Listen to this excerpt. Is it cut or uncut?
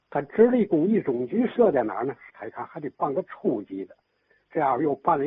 cut